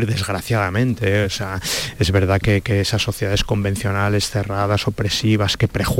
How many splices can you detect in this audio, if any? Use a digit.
0